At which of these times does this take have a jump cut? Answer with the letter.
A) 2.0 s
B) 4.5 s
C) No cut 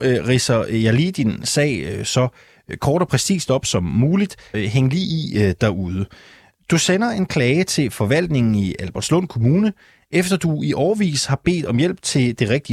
B